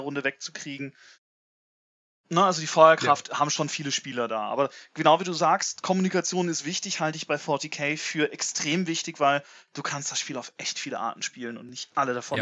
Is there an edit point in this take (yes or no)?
no